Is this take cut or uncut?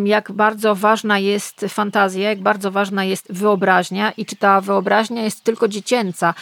uncut